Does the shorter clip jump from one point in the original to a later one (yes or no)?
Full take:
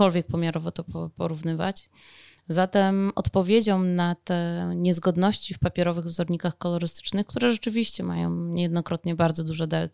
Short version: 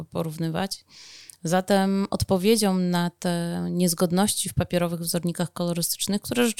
no